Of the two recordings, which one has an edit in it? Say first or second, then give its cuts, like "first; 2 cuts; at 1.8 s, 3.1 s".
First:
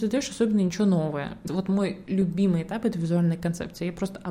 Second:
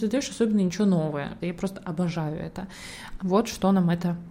second; 2 cuts; at 1.4 s, 3.2 s